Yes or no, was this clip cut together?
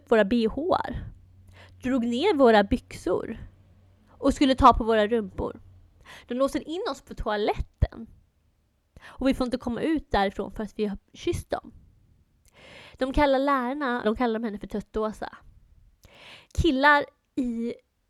yes